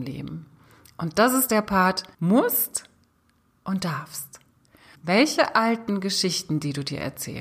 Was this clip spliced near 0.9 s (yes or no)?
no